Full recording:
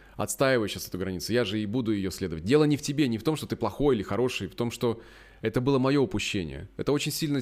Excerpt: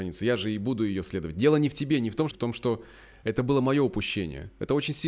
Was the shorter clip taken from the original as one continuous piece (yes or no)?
no